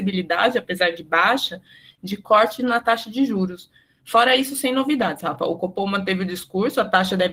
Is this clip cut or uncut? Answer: uncut